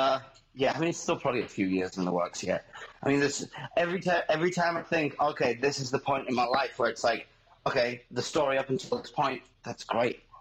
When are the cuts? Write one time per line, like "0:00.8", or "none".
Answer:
none

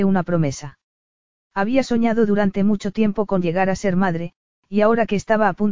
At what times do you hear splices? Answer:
0:01.4

